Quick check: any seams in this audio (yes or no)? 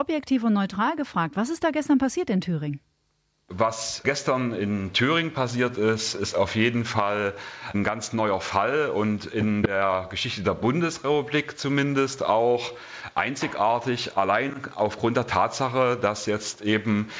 no